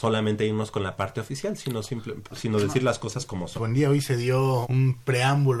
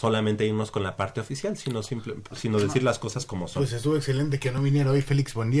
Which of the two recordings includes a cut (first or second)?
first